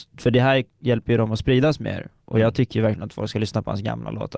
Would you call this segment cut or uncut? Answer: uncut